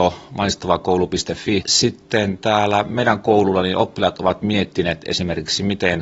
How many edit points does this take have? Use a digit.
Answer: 1